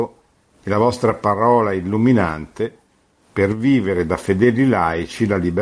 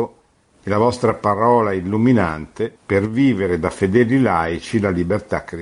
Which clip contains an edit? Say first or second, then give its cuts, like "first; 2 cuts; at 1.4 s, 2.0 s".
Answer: second; 1 cut; at 2.8 s